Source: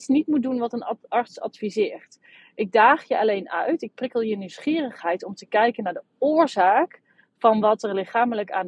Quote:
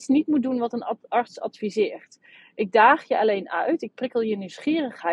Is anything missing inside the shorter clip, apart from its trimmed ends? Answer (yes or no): no